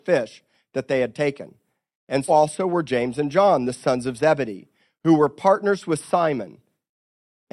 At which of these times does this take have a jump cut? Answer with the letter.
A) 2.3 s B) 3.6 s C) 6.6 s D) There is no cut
A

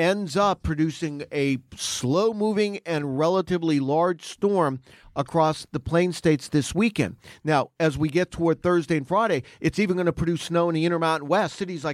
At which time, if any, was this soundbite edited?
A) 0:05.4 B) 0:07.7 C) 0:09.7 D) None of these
D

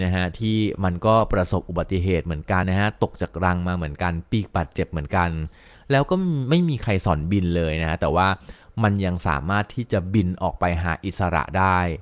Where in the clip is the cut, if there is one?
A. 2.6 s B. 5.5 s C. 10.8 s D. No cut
A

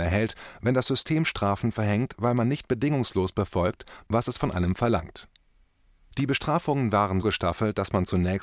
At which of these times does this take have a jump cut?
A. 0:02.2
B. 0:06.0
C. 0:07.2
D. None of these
C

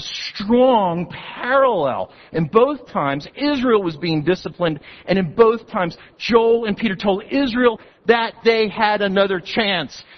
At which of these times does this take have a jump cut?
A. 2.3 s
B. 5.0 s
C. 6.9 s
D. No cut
D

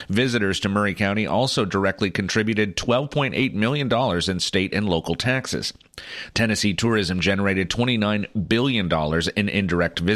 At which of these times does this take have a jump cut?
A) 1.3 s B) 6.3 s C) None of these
B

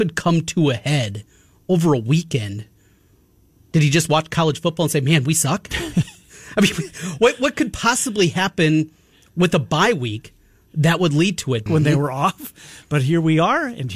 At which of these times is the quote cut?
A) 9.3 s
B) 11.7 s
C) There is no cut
B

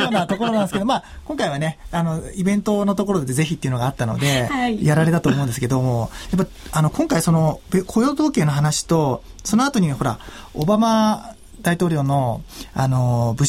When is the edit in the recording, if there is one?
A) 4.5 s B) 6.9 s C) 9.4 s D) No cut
D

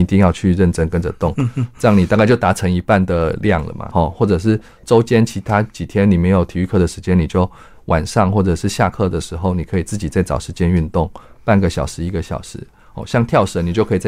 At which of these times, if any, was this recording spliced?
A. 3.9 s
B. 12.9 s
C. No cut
A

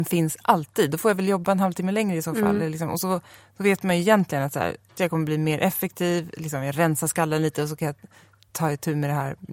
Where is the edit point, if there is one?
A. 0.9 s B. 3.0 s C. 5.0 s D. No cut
C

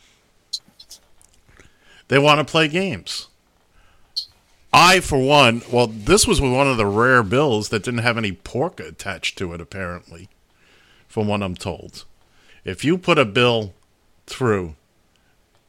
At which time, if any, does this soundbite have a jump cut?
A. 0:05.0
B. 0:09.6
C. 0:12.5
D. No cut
C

